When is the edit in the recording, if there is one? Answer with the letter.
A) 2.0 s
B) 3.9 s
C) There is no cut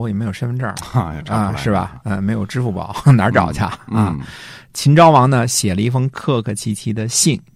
C